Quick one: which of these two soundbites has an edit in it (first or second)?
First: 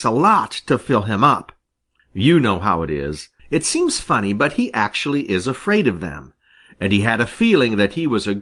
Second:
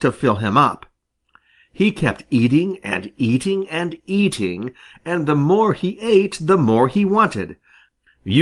first